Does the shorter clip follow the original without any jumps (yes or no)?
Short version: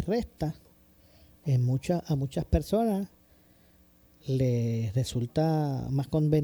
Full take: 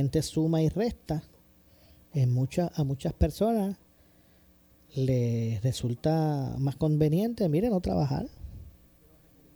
yes